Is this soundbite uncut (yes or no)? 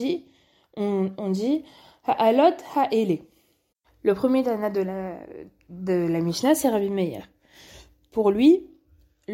yes